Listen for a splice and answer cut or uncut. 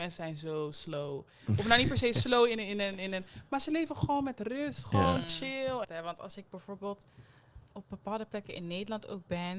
cut